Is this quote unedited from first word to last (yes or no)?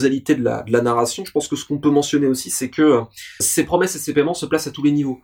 no